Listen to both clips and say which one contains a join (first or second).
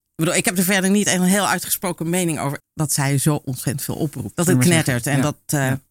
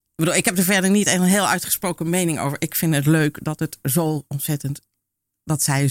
first